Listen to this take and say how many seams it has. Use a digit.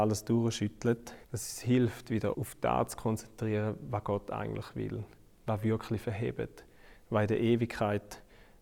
2